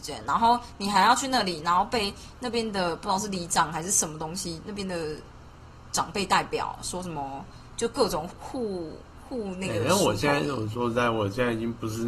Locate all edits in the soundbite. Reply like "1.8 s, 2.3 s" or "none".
8.3 s